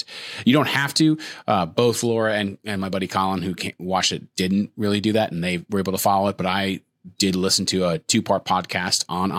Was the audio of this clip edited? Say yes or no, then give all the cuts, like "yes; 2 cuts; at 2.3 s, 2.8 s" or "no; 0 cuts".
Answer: no; 0 cuts